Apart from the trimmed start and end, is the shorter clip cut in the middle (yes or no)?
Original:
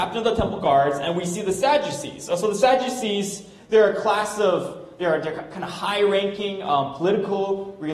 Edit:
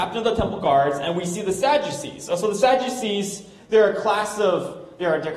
no